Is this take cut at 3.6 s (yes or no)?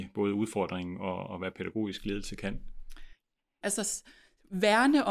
yes